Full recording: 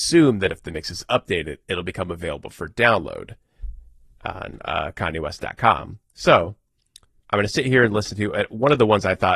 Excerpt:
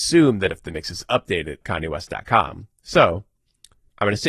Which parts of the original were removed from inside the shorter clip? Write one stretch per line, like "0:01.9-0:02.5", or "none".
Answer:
0:01.6-0:04.9